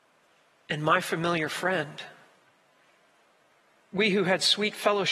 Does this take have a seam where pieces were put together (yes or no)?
no